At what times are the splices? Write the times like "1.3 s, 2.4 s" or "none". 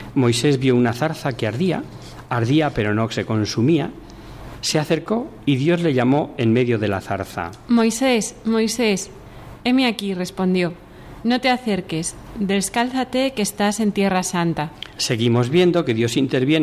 none